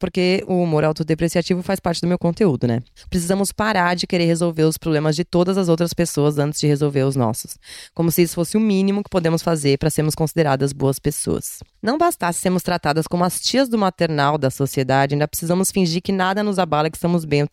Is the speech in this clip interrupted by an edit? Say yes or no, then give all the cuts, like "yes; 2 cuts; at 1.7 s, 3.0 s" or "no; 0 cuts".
yes; 1 cut; at 3.0 s